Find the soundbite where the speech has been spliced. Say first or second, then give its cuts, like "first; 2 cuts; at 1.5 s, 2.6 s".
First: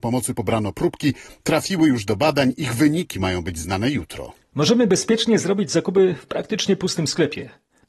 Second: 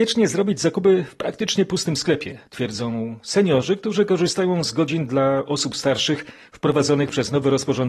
second; 1 cut; at 2.5 s